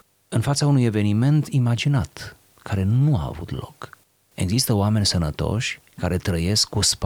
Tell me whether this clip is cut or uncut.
uncut